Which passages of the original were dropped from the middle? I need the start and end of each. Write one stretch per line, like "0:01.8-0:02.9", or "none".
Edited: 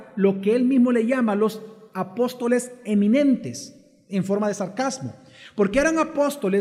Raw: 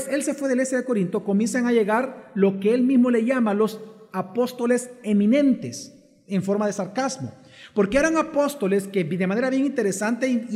none